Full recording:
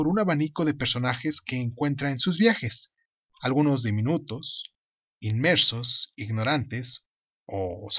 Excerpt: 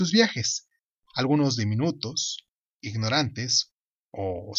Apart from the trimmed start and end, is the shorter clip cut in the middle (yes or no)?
yes